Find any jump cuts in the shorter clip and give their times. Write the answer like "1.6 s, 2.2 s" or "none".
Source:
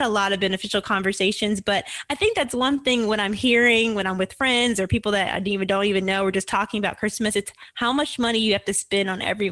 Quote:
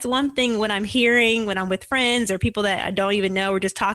2.9 s